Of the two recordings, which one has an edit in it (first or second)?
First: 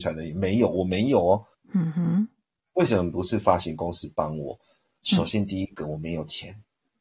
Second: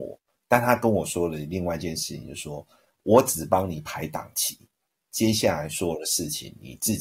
first